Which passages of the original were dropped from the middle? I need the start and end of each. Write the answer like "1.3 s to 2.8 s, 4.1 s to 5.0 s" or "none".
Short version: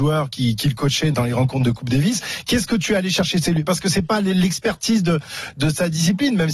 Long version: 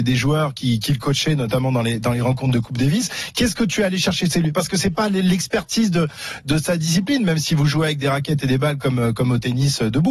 1.4 s to 2.0 s